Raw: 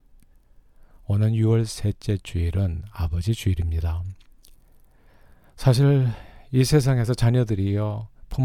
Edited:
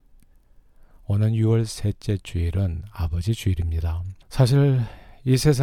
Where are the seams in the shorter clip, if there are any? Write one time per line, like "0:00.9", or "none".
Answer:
0:04.2